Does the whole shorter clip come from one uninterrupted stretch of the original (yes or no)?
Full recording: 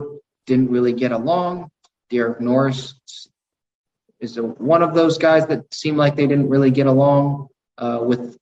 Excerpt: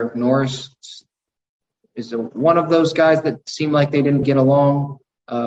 no